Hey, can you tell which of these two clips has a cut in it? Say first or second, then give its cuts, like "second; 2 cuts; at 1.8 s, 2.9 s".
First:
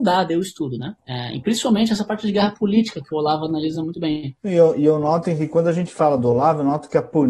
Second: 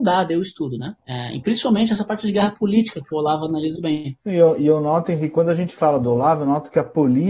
second; 1 cut; at 3.8 s